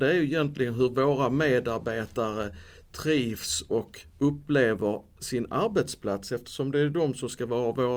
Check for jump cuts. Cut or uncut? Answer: uncut